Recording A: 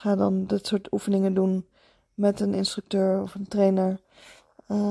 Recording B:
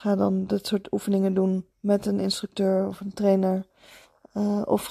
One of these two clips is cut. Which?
B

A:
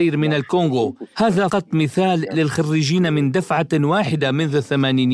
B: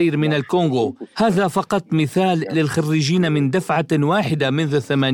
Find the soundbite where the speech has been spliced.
A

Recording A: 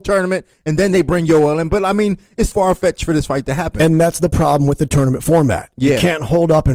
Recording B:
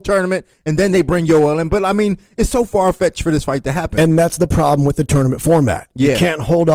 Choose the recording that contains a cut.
A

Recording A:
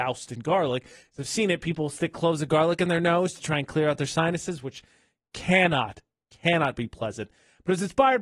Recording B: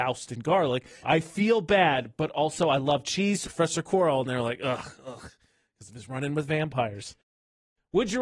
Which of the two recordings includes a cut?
B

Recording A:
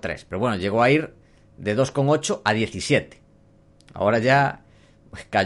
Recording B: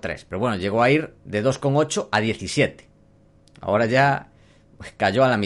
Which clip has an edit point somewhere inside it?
B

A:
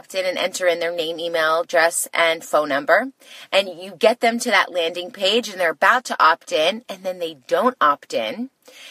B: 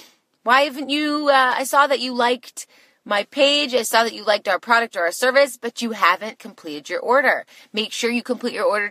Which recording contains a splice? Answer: B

